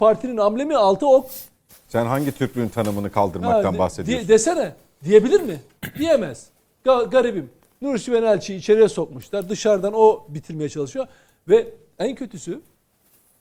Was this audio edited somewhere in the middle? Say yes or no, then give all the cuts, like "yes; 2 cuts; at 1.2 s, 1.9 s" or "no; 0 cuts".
yes; 1 cut; at 1.7 s